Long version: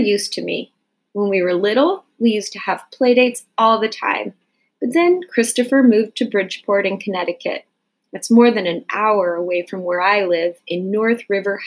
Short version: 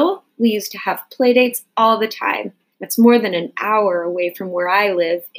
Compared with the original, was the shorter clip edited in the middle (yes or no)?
yes